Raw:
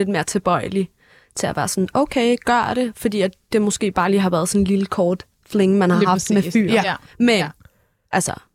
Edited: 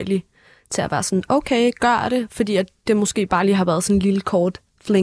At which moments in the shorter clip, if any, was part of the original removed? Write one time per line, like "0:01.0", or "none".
none